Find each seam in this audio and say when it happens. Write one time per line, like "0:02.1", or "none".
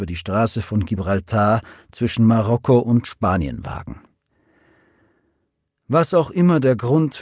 none